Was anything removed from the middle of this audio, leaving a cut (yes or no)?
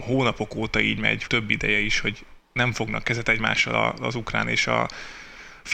yes